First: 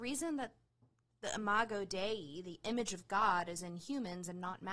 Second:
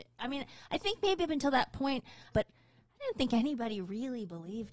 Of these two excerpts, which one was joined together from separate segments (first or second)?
second